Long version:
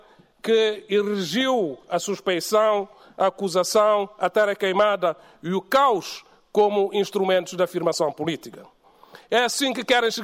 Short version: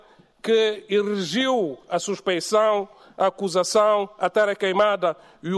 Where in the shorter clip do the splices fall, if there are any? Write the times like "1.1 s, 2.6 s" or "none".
none